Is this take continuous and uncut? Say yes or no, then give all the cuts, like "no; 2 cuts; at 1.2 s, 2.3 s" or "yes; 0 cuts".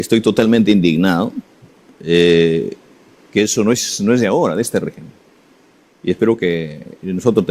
yes; 0 cuts